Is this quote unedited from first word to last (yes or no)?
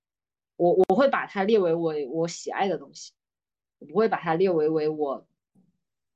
yes